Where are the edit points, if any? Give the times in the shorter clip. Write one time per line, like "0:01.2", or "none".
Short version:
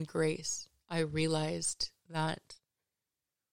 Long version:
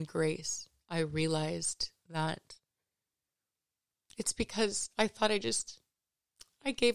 none